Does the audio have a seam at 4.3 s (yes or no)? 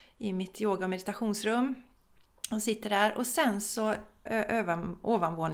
yes